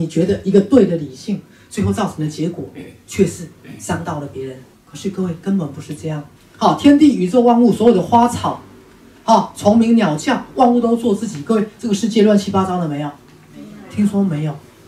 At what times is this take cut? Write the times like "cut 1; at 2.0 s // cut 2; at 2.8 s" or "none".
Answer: cut 1; at 4.7 s // cut 2; at 6.4 s